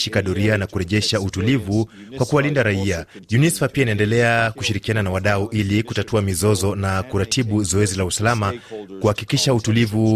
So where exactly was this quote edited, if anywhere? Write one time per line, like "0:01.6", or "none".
none